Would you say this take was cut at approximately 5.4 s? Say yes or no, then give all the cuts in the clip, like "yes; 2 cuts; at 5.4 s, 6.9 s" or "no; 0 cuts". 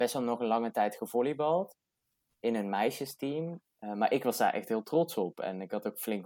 no; 1 cut; at 3.6 s